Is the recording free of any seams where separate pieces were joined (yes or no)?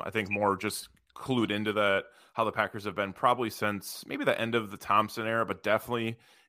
yes